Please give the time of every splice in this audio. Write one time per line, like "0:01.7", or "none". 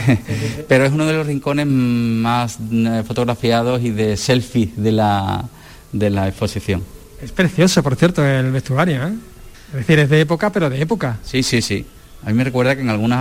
none